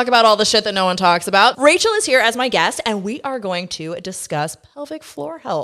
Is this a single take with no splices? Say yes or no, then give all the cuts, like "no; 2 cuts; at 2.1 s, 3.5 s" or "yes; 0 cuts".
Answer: no; 1 cut; at 1.5 s